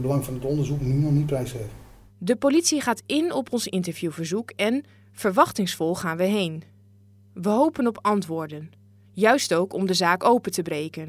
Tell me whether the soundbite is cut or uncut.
uncut